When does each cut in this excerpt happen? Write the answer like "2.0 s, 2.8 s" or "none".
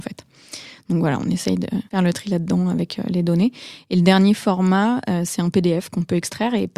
1.9 s